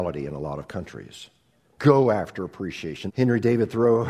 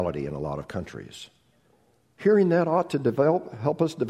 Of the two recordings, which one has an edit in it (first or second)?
first